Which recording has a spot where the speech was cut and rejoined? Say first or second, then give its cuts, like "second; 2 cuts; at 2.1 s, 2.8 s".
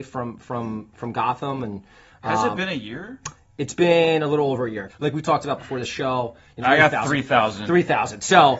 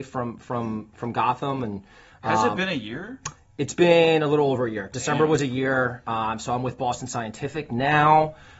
first; 2 cuts; at 4.9 s, 6.6 s